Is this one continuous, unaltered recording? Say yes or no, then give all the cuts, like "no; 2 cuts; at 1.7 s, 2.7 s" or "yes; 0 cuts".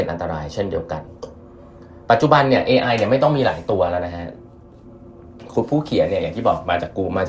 yes; 0 cuts